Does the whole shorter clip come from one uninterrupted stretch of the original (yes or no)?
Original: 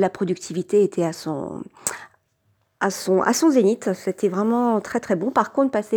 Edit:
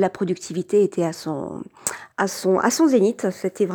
no